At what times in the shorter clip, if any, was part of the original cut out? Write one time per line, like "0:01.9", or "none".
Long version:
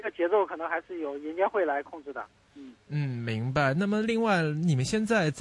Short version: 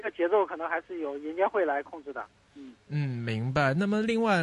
none